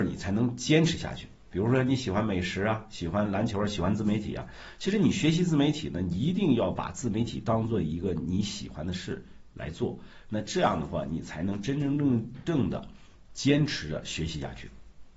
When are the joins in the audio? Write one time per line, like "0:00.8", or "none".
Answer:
none